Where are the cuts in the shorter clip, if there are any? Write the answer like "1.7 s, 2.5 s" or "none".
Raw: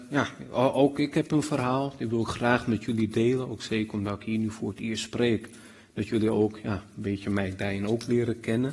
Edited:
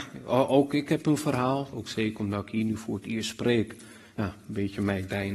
1.7 s, 4.2 s